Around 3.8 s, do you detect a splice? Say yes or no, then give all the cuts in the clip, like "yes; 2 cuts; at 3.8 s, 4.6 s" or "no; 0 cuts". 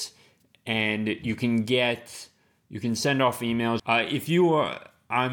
yes; 1 cut; at 3.8 s